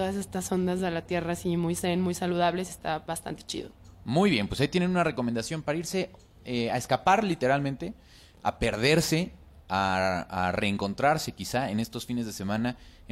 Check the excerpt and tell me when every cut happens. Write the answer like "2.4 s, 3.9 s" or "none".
none